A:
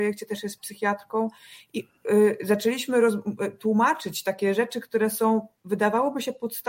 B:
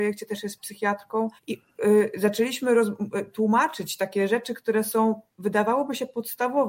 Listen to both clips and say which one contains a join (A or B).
B